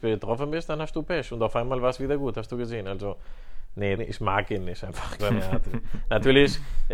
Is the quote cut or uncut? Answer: cut